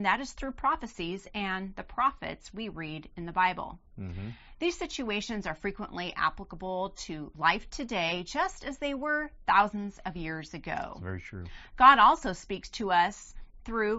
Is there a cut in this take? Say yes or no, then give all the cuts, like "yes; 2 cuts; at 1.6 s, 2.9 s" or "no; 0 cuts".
no; 0 cuts